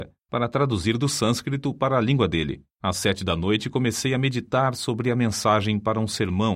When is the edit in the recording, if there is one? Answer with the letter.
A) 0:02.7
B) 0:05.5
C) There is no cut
A